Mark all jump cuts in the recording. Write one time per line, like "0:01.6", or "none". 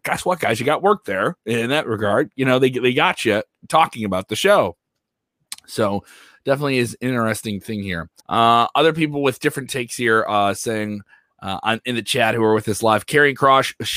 0:08.2